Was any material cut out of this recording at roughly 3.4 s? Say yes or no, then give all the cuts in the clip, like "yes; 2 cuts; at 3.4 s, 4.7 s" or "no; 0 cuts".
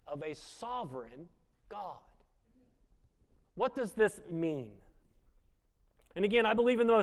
yes; 1 cut; at 3.4 s